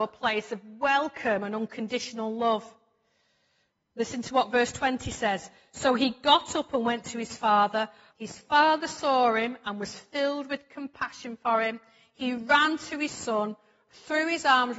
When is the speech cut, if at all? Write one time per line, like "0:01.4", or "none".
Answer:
0:08.1